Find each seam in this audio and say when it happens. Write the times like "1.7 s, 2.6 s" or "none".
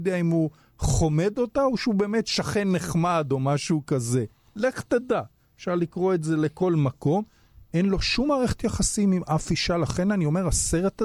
none